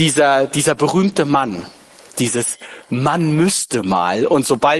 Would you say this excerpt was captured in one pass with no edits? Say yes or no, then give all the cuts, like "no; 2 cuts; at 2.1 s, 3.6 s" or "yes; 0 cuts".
yes; 0 cuts